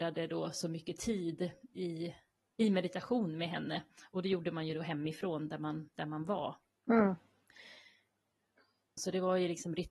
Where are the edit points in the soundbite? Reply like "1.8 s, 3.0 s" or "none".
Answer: 9.0 s